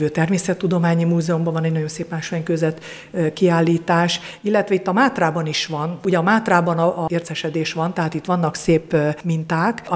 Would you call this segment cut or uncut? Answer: cut